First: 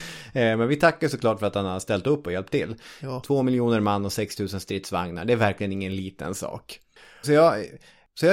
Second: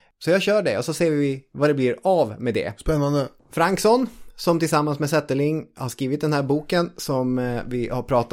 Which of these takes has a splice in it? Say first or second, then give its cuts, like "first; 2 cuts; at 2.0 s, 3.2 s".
first; 2 cuts; at 3.2 s, 7.2 s